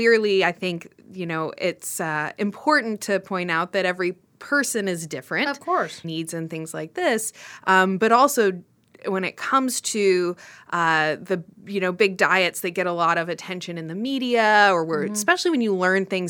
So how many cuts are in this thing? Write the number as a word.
one